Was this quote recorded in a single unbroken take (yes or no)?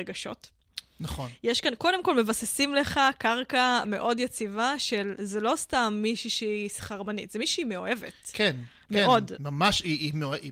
yes